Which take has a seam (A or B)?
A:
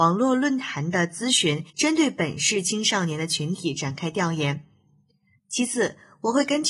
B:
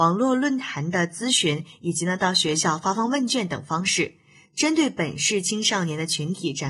A